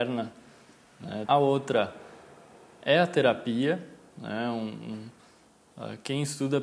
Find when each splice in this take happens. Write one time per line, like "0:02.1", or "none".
0:01.2

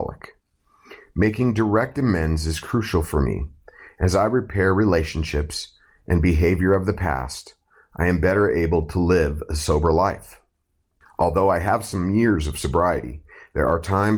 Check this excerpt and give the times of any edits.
none

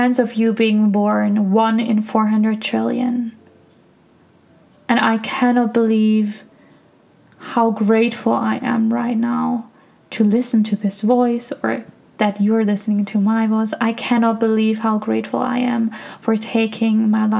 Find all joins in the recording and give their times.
none

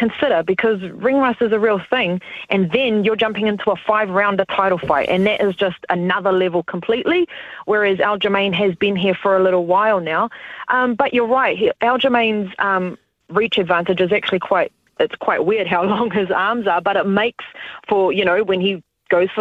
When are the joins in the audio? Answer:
none

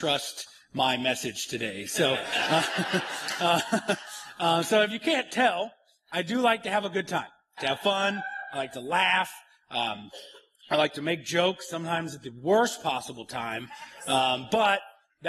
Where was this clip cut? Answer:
0:07.6

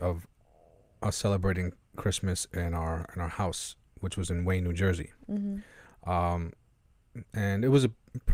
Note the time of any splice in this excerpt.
none

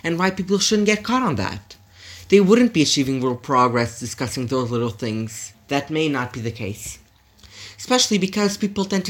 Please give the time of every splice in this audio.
0:05.5

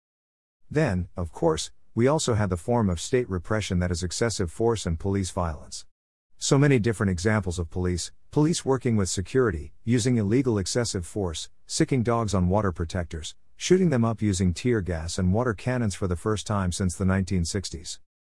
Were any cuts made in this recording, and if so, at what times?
none

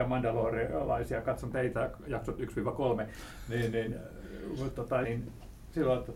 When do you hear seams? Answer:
0:05.0

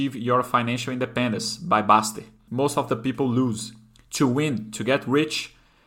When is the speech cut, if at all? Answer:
0:02.5

